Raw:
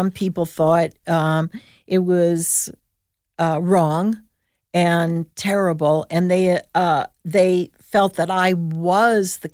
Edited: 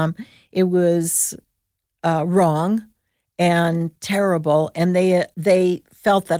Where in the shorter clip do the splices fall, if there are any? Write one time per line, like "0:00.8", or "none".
0:05.3